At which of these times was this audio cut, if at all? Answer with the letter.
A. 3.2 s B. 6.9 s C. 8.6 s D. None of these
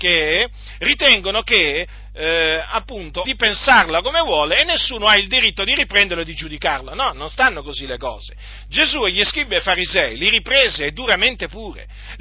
A